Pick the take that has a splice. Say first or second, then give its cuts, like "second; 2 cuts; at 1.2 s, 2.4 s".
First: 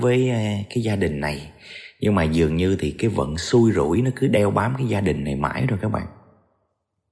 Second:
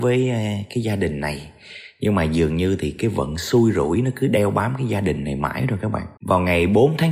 second; 1 cut; at 6.2 s